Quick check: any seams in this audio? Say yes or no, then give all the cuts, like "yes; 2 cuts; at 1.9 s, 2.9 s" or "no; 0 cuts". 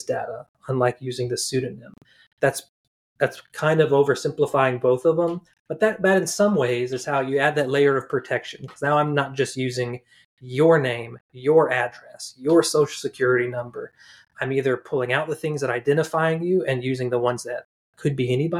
no; 0 cuts